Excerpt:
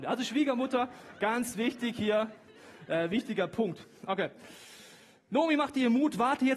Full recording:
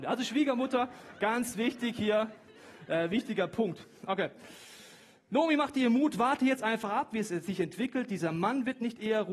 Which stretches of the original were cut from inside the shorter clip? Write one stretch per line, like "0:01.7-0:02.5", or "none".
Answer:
none